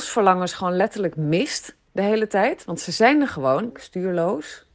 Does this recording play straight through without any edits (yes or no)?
no